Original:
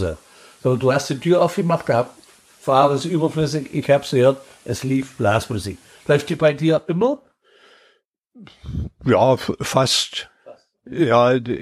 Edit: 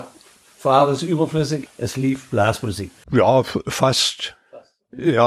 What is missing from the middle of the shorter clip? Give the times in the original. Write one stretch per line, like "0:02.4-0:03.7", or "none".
0:03.7-0:04.5
0:05.9-0:09.0